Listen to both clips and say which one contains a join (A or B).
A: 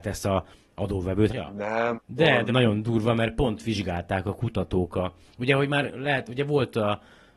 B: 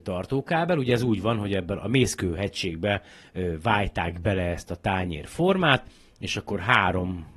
A